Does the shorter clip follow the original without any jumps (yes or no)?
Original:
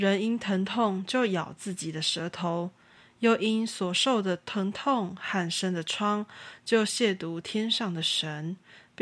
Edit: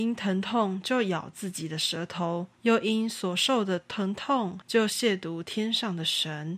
no